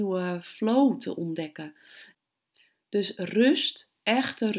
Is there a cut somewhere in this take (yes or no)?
no